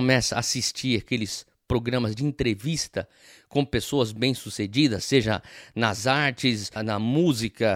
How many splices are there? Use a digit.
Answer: 1